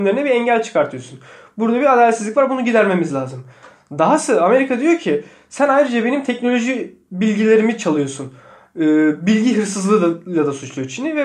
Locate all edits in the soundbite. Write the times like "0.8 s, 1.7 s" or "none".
none